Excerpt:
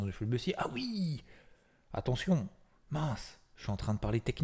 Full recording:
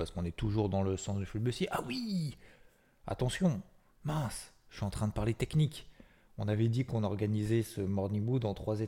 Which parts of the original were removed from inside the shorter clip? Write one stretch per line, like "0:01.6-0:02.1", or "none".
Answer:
none

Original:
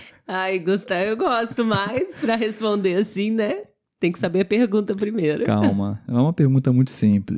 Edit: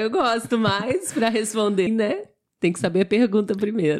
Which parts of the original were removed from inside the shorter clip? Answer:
0:02.9-0:03.3

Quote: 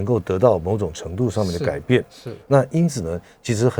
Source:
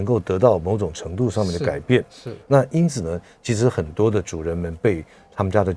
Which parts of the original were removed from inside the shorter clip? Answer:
none

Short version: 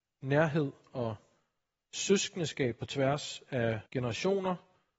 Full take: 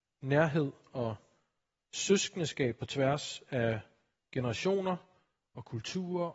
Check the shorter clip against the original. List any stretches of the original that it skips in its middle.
0:03.9-0:04.3

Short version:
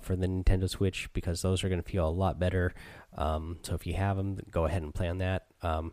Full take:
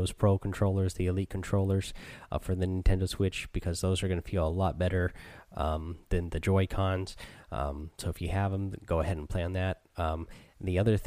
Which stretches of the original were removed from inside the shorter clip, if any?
0:06.0-0:08.0

